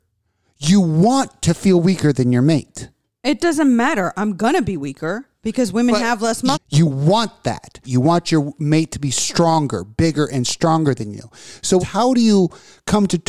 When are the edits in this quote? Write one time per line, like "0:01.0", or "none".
0:06.5
0:07.8
0:11.8